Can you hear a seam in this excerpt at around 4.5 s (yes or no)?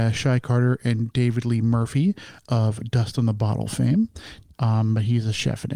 yes